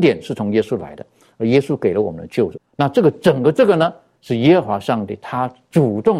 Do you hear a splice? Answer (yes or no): yes